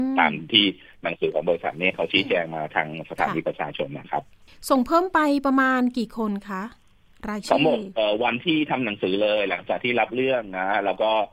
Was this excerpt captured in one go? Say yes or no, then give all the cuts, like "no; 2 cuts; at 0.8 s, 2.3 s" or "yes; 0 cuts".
yes; 0 cuts